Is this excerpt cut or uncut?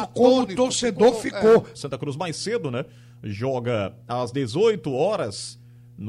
cut